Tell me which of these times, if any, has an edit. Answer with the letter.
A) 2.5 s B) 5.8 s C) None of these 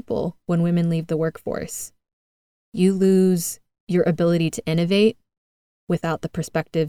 C